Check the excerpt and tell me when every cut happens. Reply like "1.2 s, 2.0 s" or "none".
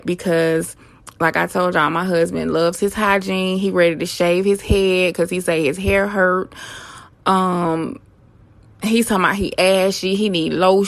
none